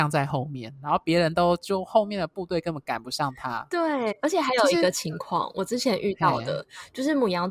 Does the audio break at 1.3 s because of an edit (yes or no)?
no